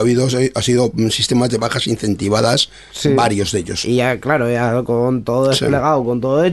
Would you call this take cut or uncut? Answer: cut